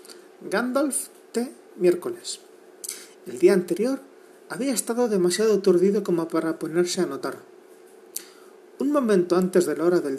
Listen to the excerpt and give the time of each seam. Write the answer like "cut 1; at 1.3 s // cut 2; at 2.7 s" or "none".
none